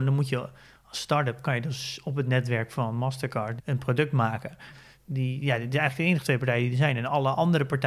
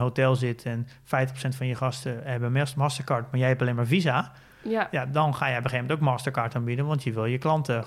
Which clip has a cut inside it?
first; 2 cuts; at 3.6 s, 4.7 s

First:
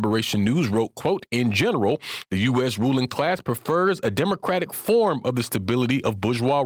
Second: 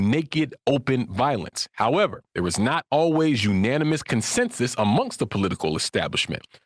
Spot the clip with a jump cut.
second; 1 cut; at 2.3 s

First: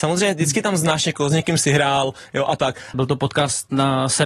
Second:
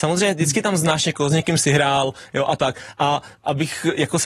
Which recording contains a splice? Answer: first; 1 cut; at 2.9 s

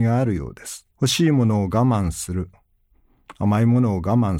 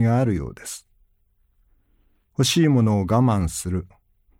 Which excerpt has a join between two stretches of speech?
first; 1 cut; at 0.9 s

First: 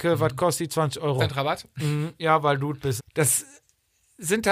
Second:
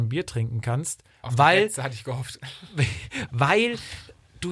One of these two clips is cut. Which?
first; 2 cuts; at 1.2 s, 3.0 s

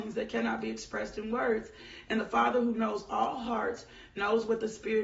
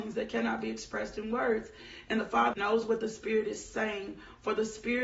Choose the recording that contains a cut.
second; 1 cut; at 2.5 s

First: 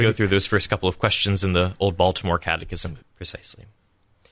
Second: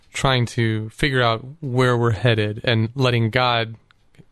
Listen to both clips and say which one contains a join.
first; 1 cut; at 3.0 s

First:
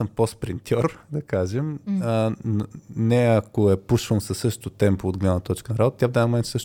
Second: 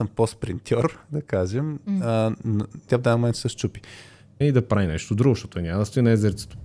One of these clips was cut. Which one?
second; 2 cuts; at 2.9 s, 4.4 s

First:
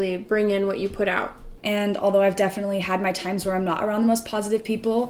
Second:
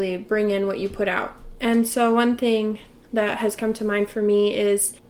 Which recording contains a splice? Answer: first; 1 cut; at 1.6 s

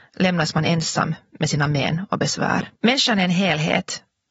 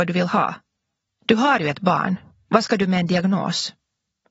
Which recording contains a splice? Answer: first; 1 cut; at 2.8 s

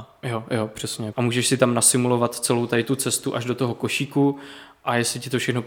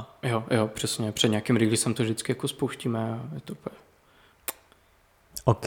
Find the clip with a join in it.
first; 1 cut; at 1.1 s

